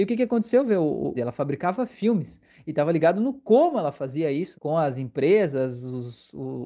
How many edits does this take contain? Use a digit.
2